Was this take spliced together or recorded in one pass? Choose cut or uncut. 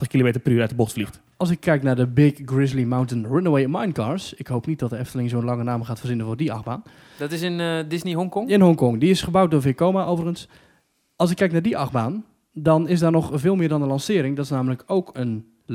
uncut